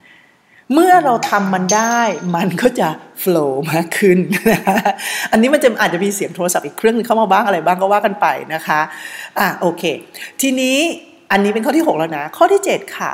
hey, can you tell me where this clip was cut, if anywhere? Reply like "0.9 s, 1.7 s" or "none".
none